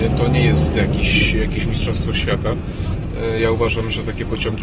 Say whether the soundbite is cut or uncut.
uncut